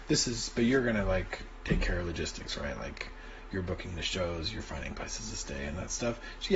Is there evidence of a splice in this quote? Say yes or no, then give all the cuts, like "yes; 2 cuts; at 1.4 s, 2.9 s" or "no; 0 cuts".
no; 0 cuts